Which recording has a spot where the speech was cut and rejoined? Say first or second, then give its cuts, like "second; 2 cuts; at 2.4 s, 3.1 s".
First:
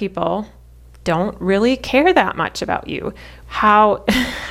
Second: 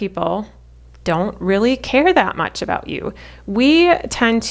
first; 1 cut; at 3.4 s